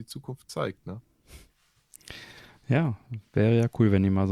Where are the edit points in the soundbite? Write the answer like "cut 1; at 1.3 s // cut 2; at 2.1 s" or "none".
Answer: cut 1; at 3.2 s